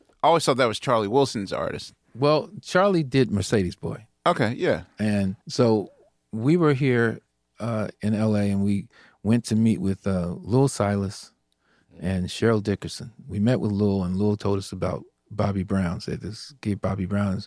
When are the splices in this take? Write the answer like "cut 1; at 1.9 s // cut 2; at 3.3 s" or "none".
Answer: cut 1; at 5.4 s